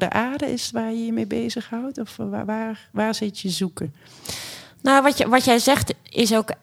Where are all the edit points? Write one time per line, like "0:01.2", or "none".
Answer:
none